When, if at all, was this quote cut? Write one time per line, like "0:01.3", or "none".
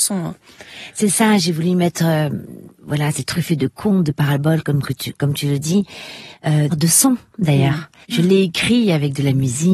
0:06.7
0:08.0

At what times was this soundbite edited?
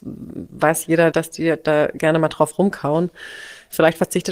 0:01.1

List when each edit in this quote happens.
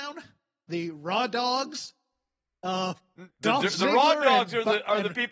0:03.3

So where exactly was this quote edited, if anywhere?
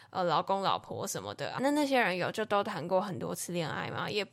0:01.6

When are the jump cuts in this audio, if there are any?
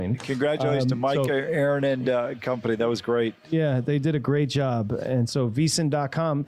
none

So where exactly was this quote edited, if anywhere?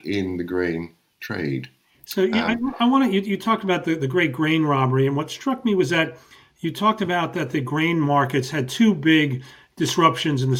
none

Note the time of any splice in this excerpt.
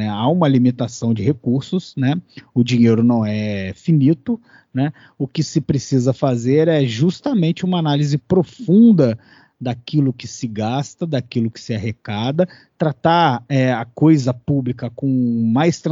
none

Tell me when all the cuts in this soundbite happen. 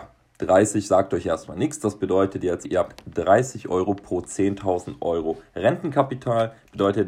0:02.6

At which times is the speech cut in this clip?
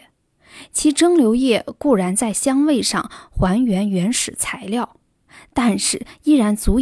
none

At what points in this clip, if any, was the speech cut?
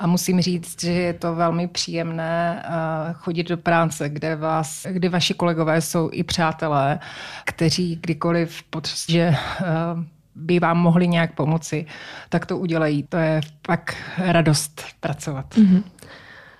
0:04.8
0:09.1
0:13.1

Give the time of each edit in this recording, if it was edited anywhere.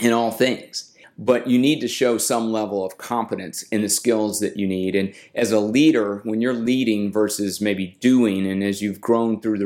0:01.0

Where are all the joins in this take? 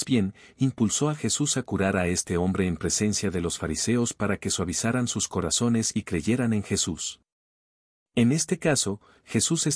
0:08.0

